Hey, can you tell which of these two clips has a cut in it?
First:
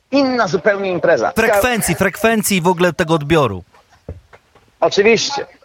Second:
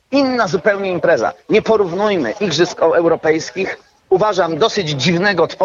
first; 1 cut; at 1.4 s

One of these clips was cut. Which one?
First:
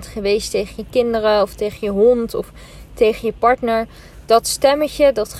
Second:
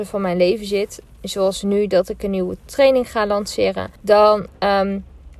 second; 2 cuts; at 1.2 s, 4.0 s

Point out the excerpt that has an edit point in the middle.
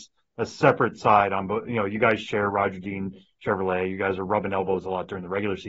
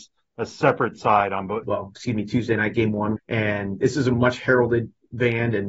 second; 2 cuts; at 1.6 s, 3.2 s

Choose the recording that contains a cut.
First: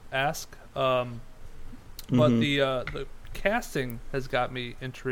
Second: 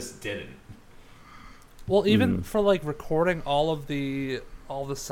first; 1 cut; at 2.9 s

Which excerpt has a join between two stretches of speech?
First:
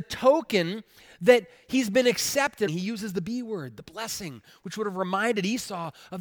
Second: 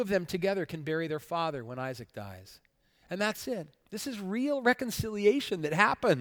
first; 1 cut; at 2.7 s

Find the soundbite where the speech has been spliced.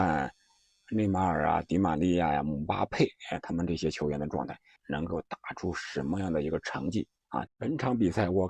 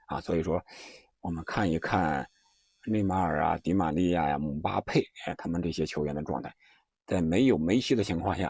first; 2 cuts; at 4.8 s, 7.5 s

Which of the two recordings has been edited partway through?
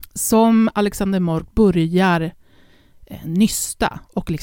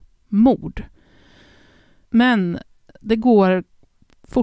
second; 1 cut; at 2.0 s

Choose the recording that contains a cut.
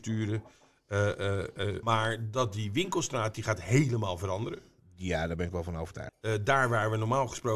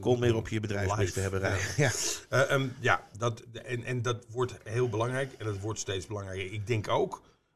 first; 2 cuts; at 1.8 s, 6.1 s

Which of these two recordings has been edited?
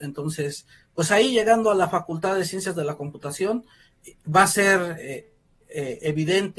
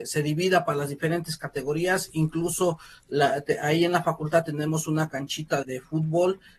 second; 1 cut; at 5.6 s

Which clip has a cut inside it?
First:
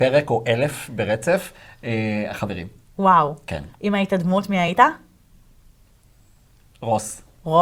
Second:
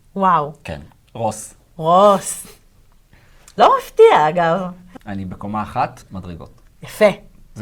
second; 2 cuts; at 1.0 s, 5.0 s

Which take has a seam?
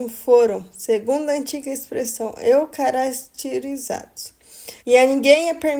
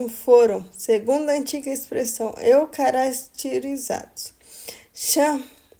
first; 1 cut; at 4.8 s

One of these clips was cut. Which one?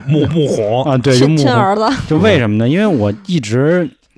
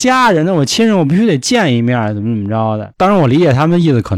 second; 1 cut; at 2.9 s

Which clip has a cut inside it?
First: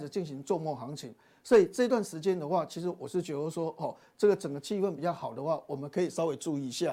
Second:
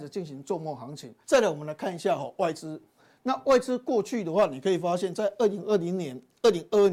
second; 1 cut; at 1.2 s

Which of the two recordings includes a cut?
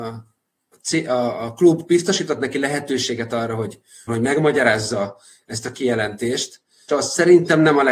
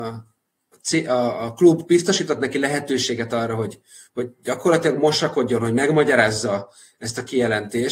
first; 2 cuts; at 4.1 s, 6.9 s

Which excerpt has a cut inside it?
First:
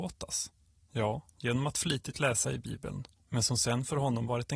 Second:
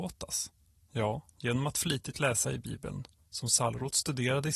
first; 1 cut; at 3.2 s

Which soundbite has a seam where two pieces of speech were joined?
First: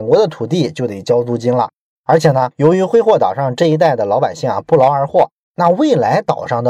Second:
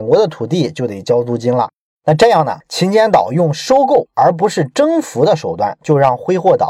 first; 2 cuts; at 1.9 s, 5.5 s

